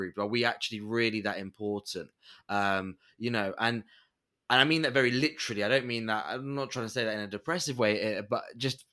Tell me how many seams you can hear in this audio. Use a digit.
0